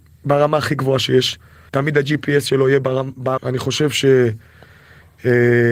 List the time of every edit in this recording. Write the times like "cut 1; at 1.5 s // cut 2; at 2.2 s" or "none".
cut 1; at 1.7 s // cut 2; at 3.4 s

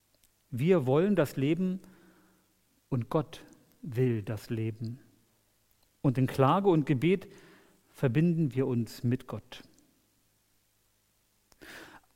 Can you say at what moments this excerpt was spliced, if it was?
none

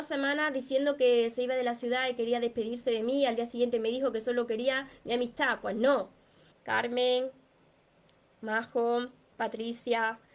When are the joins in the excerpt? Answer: cut 1; at 6.5 s

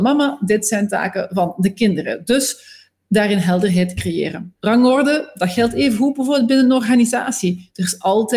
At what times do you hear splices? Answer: none

